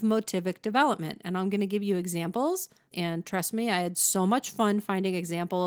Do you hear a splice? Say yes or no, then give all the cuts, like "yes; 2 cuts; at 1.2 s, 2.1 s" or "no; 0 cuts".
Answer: yes; 1 cut; at 2.9 s